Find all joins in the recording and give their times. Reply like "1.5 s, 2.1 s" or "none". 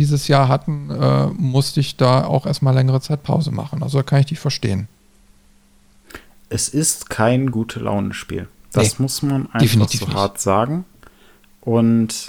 none